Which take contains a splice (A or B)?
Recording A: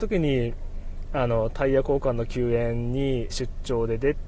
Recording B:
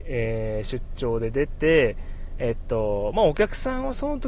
A